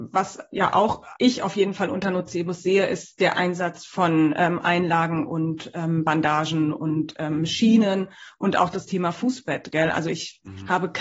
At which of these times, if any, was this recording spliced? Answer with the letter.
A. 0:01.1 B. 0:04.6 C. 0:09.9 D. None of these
A